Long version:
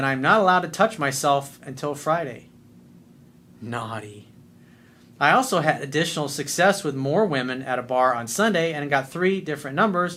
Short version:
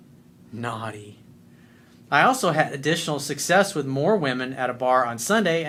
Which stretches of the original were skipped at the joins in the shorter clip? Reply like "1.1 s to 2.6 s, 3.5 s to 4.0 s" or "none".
none